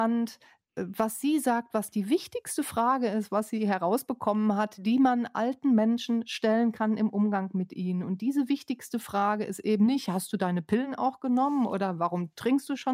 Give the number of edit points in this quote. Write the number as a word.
zero